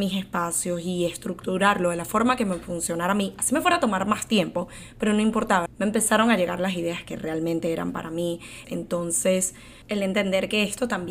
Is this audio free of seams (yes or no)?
no